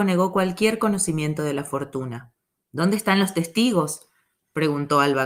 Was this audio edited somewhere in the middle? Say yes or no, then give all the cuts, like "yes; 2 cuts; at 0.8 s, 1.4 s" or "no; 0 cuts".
yes; 1 cut; at 2.6 s